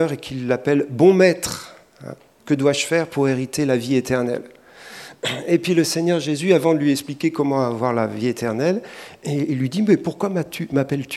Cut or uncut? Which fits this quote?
uncut